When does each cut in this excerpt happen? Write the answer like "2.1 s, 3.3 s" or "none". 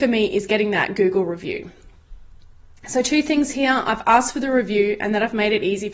none